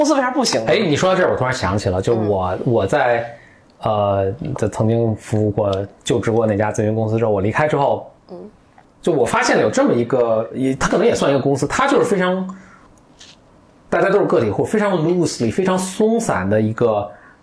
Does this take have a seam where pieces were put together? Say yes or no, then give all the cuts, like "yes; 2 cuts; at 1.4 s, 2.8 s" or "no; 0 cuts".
no; 0 cuts